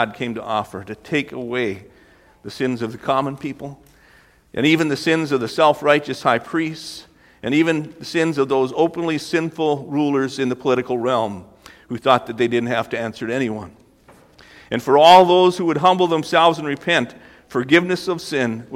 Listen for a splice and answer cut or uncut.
uncut